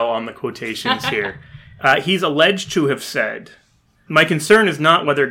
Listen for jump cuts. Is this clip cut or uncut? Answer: cut